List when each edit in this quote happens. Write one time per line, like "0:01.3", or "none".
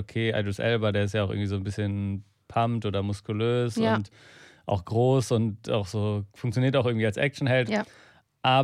0:06.3
0:07.7